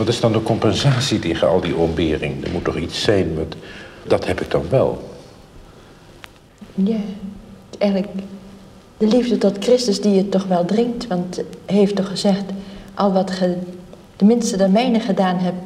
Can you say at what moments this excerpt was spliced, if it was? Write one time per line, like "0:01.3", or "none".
0:04.0

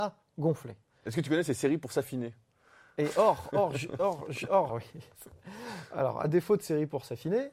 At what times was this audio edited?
0:04.7

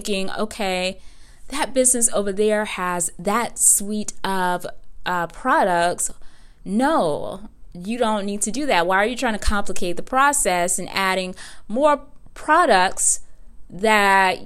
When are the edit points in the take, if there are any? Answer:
0:06.6

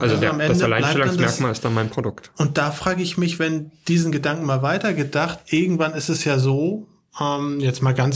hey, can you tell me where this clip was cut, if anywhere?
none

